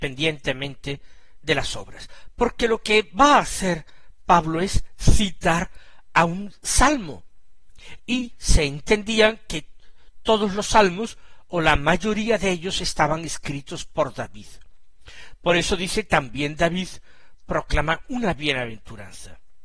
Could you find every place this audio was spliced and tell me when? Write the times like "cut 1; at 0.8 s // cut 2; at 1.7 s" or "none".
cut 1; at 2.3 s // cut 2; at 8.0 s

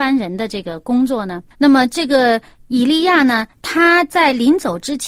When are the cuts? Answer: cut 1; at 1.5 s

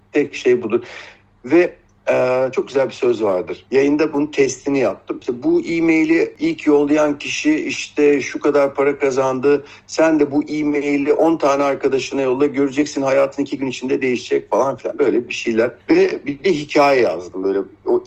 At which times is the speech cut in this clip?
cut 1; at 3.7 s

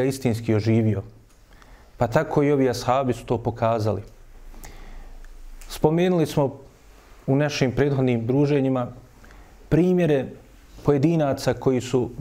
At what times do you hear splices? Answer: none

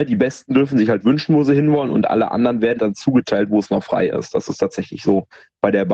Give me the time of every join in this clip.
cut 1; at 2.8 s

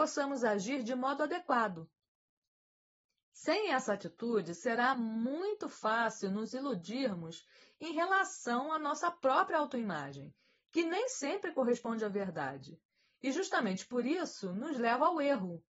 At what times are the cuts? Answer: none

